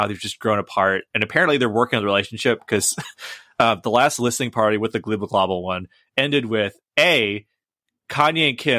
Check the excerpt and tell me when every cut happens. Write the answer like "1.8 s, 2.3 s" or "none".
none